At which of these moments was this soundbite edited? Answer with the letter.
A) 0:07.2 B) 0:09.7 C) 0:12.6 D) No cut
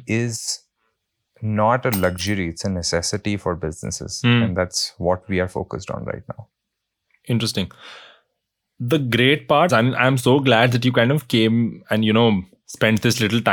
B